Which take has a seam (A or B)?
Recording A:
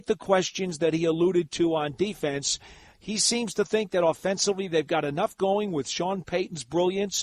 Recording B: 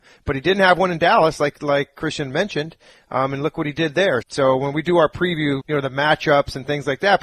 B